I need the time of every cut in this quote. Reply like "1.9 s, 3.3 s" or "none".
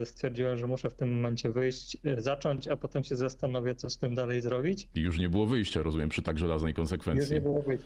none